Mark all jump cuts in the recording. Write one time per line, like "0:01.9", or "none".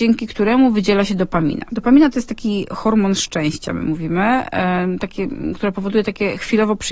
none